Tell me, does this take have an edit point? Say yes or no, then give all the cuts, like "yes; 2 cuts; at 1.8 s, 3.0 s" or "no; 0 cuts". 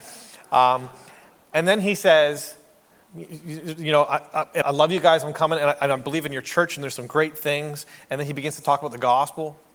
yes; 2 cuts; at 3.1 s, 4.6 s